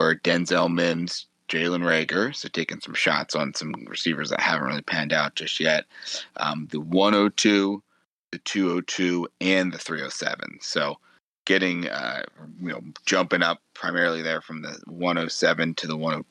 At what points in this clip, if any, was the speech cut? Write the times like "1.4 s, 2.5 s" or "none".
none

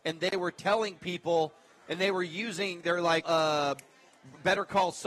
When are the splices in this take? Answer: 3.2 s

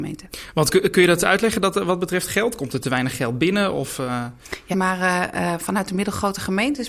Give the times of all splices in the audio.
4.7 s

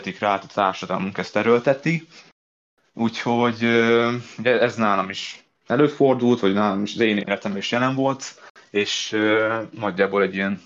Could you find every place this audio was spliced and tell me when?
none

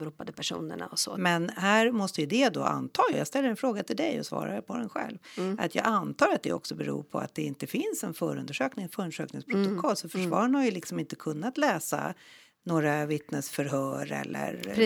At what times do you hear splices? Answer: 1.2 s, 3.1 s

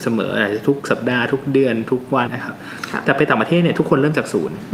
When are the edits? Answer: 2.3 s

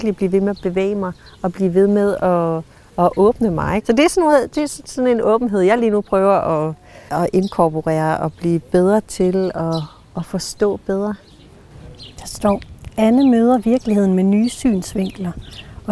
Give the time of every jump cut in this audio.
3.8 s, 7.1 s

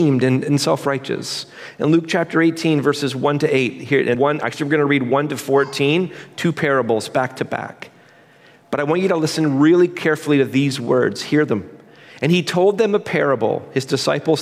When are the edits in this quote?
4.1 s

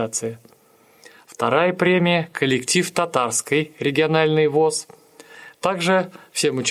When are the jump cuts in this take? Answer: 5.6 s

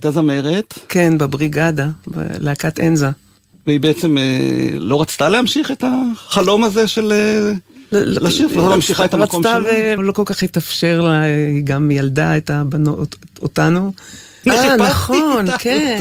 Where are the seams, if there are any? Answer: 10.0 s, 14.4 s

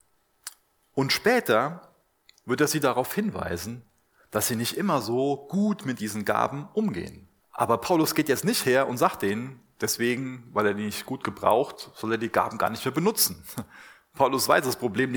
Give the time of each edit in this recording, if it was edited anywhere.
7.4 s

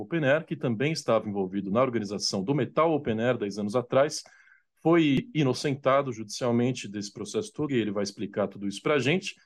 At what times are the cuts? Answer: 7.7 s

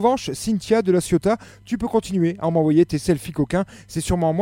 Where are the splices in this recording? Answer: none

